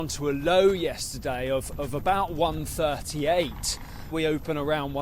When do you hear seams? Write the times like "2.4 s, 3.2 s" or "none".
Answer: 4.1 s